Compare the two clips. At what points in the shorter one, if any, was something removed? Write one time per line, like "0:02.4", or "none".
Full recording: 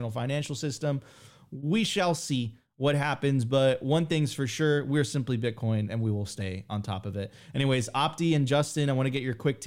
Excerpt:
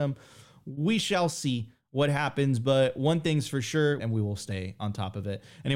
0:04.0